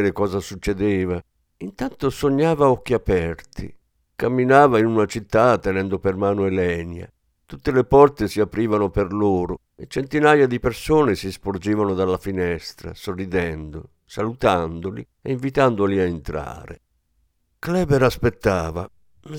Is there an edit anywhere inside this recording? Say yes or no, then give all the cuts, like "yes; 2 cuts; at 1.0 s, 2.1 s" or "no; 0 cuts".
no; 0 cuts